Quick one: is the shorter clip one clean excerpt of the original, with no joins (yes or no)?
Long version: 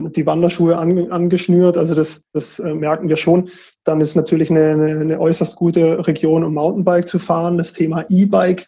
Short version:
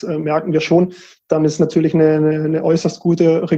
yes